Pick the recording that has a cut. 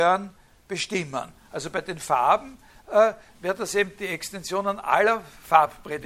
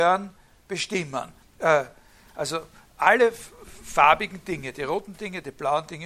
second; 1 cut; at 1.4 s

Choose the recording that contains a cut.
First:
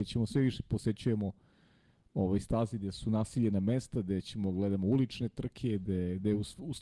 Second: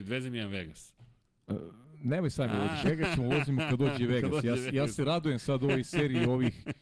second; 1 cut; at 2.8 s

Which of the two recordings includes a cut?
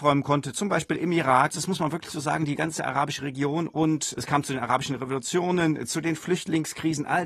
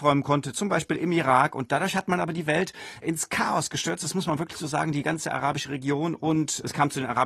first; 1 cut; at 1.5 s

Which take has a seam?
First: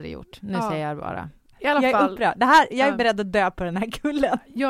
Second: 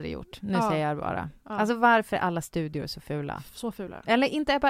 first; 1 cut; at 1.5 s

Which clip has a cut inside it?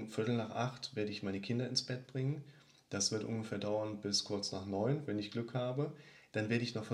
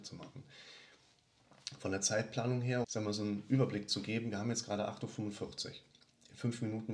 second; 1 cut; at 2.8 s

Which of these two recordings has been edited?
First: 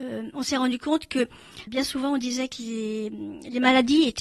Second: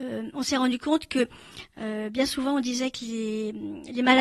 first; 1 cut; at 1.7 s

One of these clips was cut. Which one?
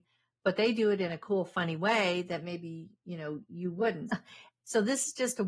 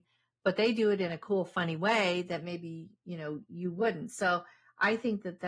first; 1 cut; at 4.1 s

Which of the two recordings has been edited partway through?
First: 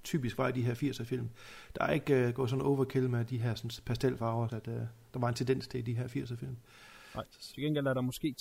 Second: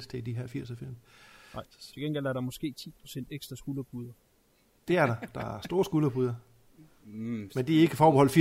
first; 1 cut; at 4.5 s

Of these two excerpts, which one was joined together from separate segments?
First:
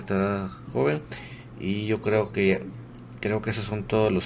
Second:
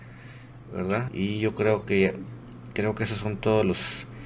second; 1 cut; at 1.1 s

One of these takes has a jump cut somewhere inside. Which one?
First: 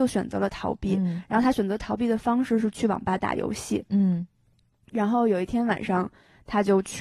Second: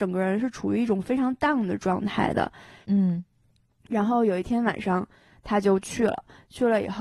second; 1 cut; at 2.8 s

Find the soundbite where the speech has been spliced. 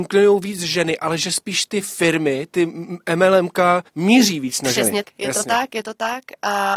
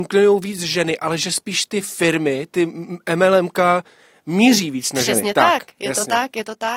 first; 2 cuts; at 3.9 s, 5.0 s

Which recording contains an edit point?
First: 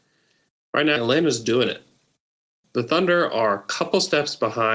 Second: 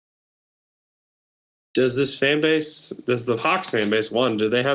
first; 2 cuts; at 1.0 s, 2.6 s

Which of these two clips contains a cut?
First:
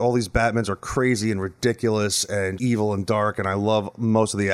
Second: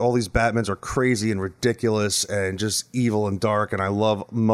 first; 1 cut; at 2.6 s

